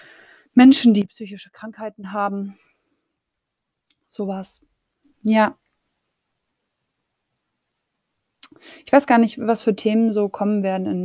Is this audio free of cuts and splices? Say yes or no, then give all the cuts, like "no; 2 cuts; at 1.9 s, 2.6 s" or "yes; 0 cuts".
no; 1 cut; at 5.0 s